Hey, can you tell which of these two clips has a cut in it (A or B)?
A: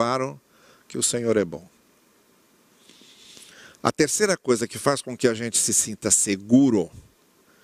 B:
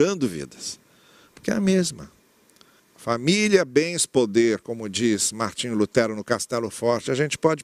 B